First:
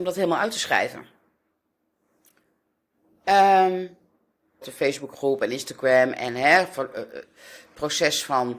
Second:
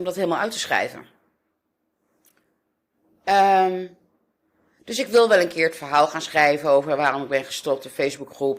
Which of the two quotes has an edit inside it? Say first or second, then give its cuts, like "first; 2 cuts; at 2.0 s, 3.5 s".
first; 1 cut; at 4.6 s